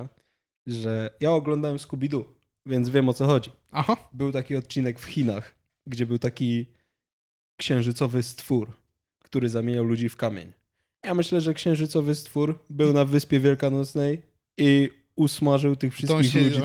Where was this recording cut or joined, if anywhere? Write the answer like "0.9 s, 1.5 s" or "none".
none